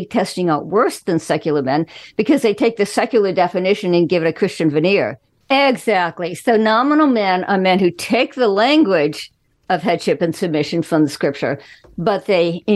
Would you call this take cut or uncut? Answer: cut